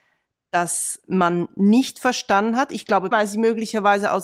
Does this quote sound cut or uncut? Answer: cut